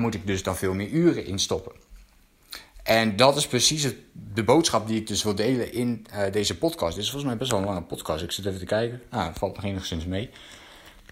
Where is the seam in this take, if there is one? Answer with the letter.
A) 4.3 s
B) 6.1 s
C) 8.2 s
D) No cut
D